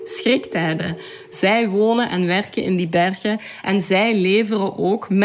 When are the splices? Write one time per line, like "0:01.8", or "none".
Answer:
none